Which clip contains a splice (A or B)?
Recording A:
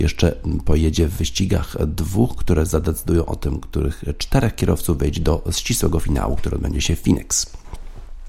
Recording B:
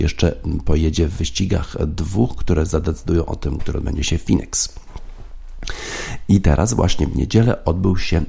B